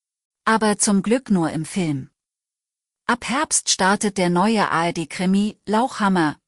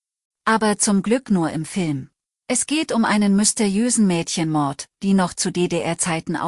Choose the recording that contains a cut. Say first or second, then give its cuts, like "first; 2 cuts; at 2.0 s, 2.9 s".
second; 2 cuts; at 2.4 s, 4.9 s